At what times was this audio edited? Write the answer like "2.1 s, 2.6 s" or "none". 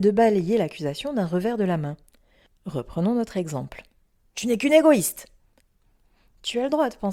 4.3 s